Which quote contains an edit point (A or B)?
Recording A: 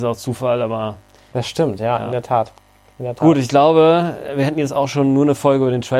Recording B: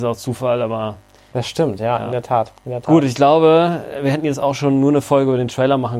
B